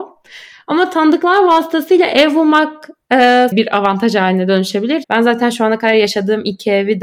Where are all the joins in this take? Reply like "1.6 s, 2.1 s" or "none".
3.5 s, 5.0 s